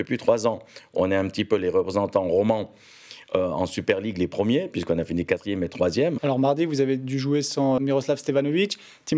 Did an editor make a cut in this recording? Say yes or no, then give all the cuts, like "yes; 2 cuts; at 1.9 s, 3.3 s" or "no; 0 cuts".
yes; 2 cuts; at 6.2 s, 7.8 s